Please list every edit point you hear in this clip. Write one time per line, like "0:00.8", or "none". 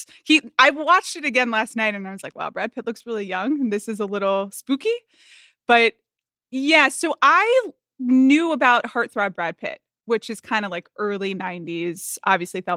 none